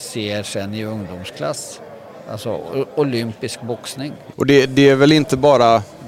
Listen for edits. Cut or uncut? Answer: cut